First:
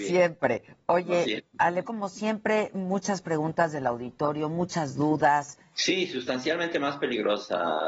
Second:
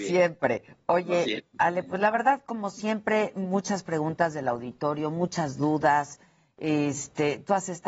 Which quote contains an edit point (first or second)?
first